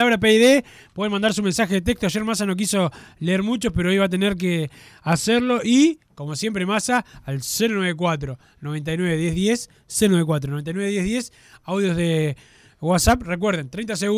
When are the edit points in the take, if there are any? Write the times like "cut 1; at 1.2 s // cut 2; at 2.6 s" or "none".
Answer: none

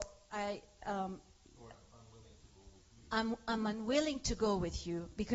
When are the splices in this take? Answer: none

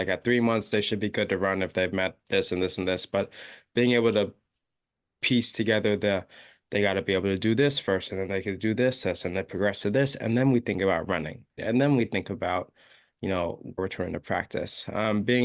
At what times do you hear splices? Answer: cut 1; at 11.6 s // cut 2; at 13.8 s

